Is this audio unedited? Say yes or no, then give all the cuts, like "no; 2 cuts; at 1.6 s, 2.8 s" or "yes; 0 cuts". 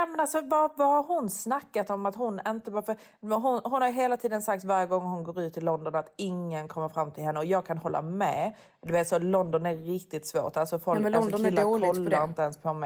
yes; 0 cuts